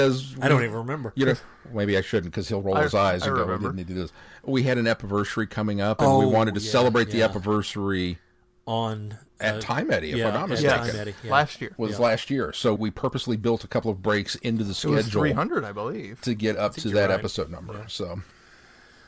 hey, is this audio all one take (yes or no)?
no